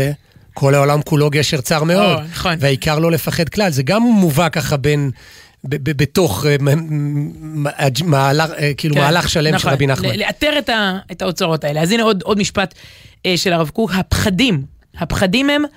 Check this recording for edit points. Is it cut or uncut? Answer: uncut